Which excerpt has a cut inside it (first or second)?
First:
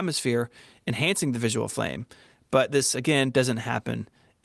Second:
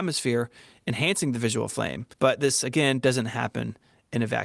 second